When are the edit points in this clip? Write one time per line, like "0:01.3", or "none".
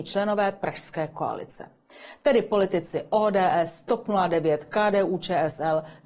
none